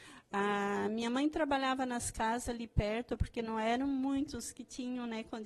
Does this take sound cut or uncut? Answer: uncut